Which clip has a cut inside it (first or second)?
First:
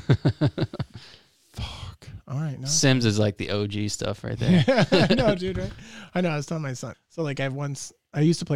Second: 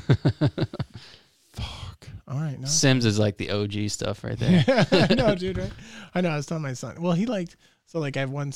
first